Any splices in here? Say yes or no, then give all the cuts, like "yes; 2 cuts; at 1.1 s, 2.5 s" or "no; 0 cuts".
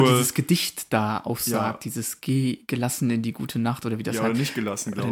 no; 0 cuts